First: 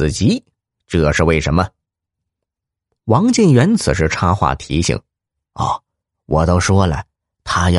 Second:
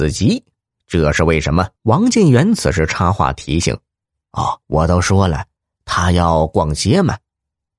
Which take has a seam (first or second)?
second